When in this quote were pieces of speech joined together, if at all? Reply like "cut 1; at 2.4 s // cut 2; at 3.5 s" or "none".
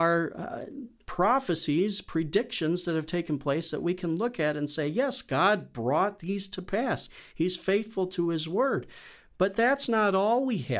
none